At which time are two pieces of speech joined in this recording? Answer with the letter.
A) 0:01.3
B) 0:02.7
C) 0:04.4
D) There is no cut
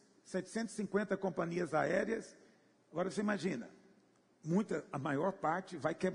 B